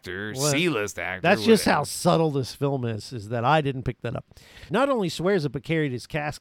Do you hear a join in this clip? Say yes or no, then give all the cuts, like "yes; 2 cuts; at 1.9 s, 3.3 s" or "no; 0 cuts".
yes; 1 cut; at 4.7 s